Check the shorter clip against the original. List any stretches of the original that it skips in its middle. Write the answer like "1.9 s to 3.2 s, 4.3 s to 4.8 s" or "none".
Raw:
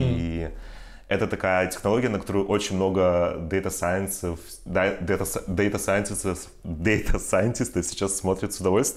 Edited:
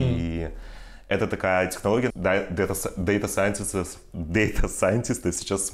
2.1 s to 4.6 s